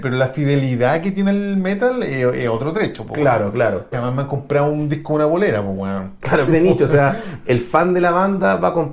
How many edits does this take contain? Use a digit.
2